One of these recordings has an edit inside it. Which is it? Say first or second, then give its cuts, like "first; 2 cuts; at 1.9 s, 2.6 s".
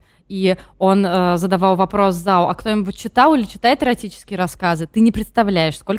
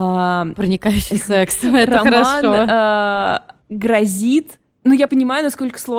second; 2 cuts; at 3.6 s, 5.1 s